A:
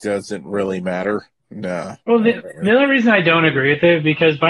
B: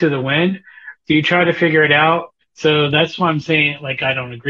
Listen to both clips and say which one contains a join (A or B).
B